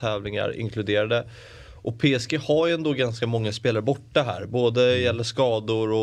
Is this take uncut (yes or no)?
yes